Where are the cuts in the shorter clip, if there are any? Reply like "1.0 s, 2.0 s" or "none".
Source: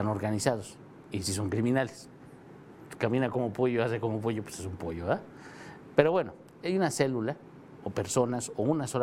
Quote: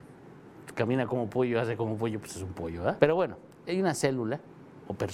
3.0 s